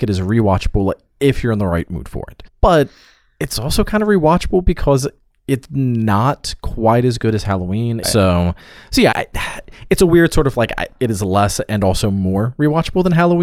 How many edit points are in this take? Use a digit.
3